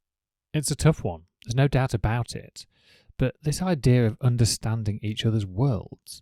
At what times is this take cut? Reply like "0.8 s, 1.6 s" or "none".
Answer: none